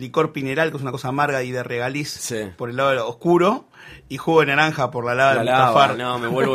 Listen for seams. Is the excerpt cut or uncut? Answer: uncut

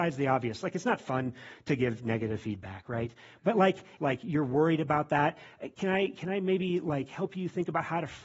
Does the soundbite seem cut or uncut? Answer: cut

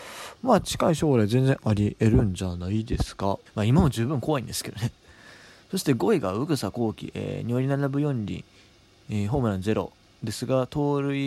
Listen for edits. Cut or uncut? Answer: cut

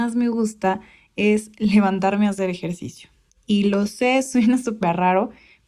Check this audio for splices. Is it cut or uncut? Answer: uncut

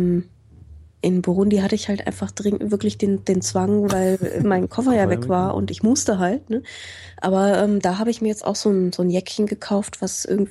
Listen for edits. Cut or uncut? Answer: uncut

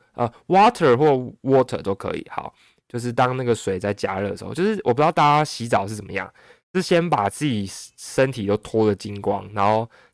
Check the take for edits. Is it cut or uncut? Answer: uncut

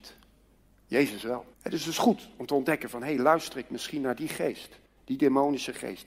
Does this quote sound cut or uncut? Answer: cut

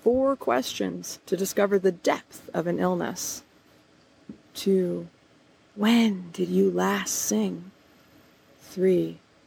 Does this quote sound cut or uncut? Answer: cut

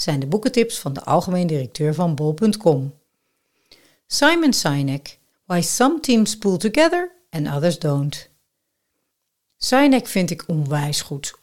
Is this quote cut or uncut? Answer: cut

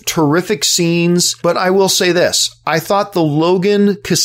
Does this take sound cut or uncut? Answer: cut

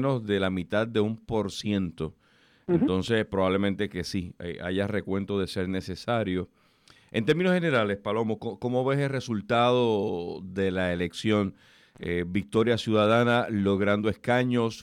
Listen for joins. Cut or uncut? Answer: uncut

